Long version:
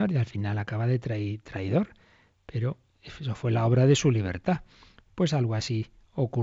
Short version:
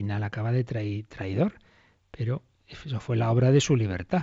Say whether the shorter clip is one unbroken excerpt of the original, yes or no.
yes